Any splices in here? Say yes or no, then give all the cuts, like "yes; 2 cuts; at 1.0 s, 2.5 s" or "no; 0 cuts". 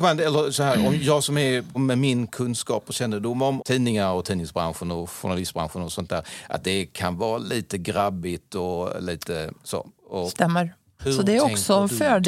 yes; 3 cuts; at 1.7 s, 3.6 s, 11.0 s